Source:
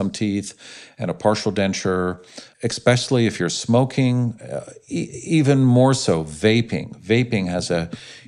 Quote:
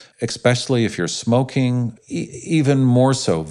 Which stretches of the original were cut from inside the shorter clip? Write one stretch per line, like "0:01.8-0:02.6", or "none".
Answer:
0:04.4-0:04.8